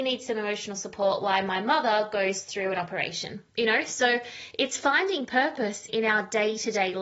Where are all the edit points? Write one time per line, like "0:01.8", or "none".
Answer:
0:03.5
0:05.9